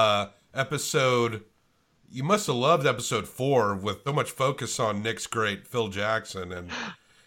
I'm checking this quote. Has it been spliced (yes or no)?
yes